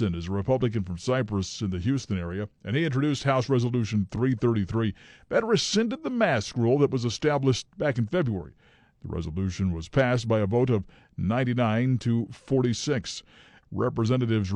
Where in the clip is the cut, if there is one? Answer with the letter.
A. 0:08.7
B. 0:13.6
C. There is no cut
B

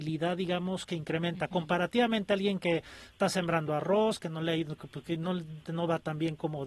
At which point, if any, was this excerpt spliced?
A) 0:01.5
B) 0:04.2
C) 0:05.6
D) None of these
C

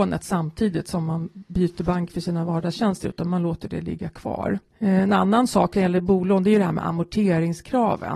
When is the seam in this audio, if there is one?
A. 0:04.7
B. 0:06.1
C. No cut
A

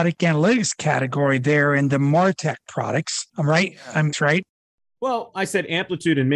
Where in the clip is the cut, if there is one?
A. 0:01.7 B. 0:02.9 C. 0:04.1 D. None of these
C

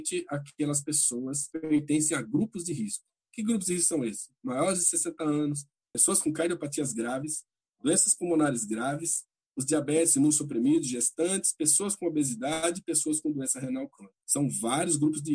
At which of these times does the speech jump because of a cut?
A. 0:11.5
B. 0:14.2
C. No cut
B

